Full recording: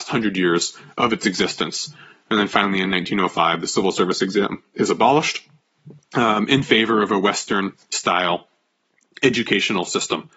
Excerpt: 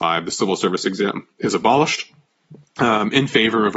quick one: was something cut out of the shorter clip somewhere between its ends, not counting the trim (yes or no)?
no